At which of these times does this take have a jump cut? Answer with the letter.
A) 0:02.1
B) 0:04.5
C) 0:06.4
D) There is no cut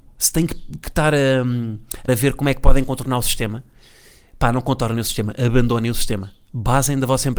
A